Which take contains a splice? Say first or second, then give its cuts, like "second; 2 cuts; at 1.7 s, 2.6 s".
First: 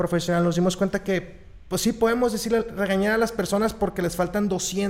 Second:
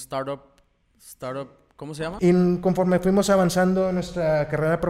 second; 1 cut; at 2.2 s